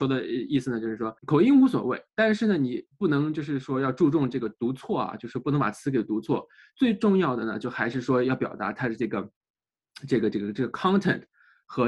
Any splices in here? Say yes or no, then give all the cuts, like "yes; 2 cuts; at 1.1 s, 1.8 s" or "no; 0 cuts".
yes; 1 cut; at 1.2 s